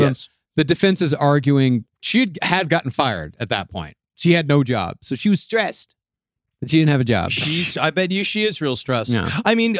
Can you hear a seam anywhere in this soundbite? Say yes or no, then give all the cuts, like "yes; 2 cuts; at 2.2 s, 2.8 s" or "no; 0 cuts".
no; 0 cuts